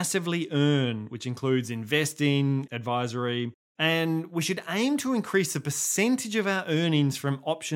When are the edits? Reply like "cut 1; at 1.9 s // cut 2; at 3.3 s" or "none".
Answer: cut 1; at 2.7 s